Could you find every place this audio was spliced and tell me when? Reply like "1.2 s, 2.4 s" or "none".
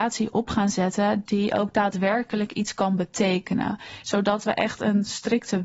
4.0 s